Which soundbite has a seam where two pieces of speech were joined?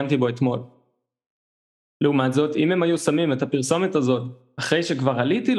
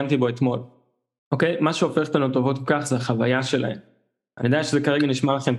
second; 1 cut; at 1.2 s

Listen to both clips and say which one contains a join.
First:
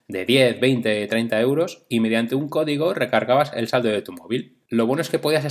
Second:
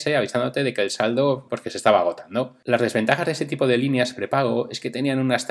second; 2 cuts; at 1.5 s, 2.6 s

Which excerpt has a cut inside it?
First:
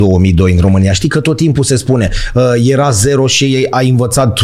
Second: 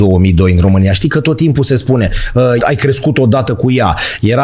second; 1 cut; at 2.6 s

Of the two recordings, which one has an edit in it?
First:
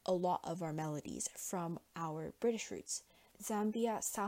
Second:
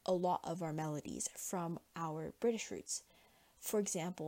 first; 1 cut; at 3.3 s

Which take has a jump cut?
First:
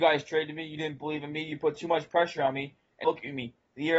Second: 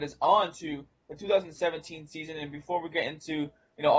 first; 1 cut; at 3.0 s

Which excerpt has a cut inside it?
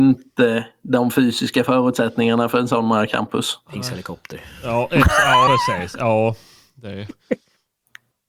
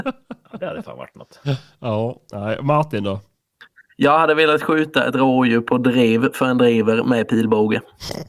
first; 1 cut; at 5.5 s

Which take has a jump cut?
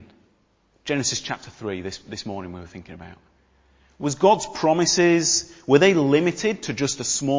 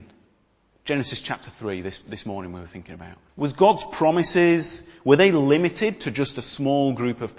second; 1 cut; at 3.3 s

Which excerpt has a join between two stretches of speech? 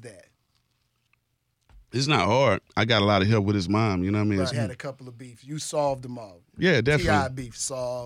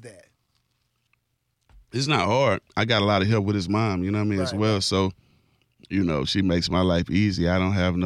first; 1 cut; at 4.5 s

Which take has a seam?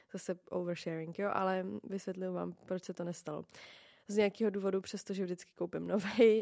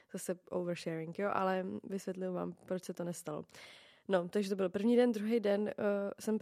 first; 1 cut; at 4.0 s

